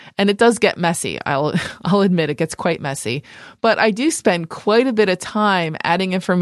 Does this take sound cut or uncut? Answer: uncut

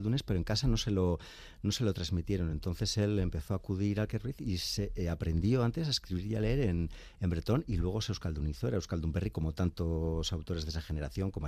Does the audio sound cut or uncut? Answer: uncut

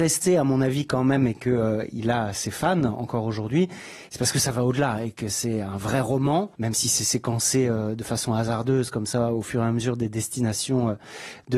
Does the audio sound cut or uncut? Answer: cut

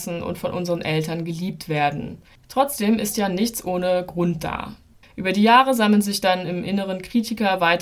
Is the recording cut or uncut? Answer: cut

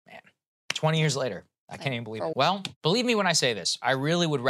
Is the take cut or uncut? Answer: cut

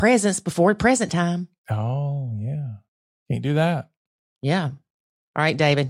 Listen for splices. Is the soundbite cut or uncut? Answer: cut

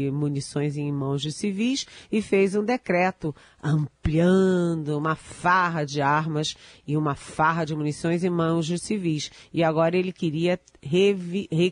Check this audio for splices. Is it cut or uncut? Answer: uncut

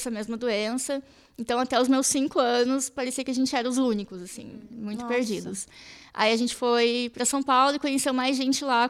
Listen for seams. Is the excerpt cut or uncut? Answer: uncut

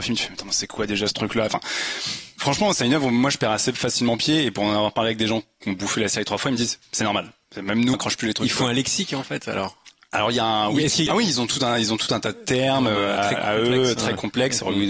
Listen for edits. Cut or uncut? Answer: cut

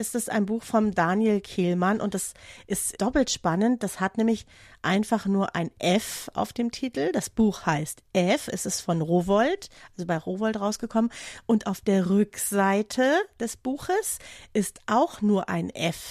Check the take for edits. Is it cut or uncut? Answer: uncut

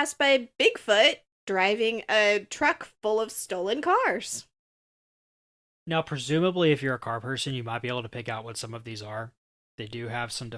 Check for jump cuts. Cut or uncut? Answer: uncut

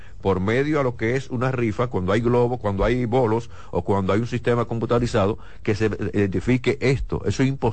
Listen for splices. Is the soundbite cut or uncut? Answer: uncut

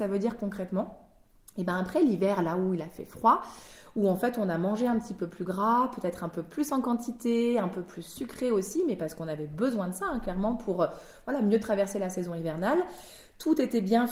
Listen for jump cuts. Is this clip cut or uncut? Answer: uncut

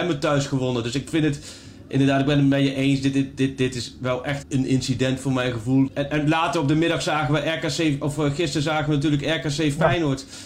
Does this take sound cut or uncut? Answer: cut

